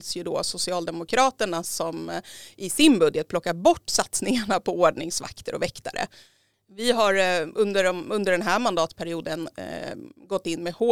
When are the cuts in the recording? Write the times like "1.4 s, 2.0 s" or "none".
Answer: 6.5 s